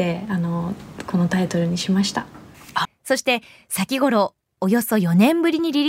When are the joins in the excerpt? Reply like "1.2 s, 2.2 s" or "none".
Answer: 2.8 s